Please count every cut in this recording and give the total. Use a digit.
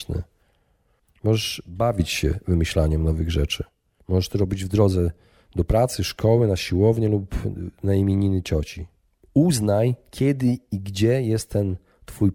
0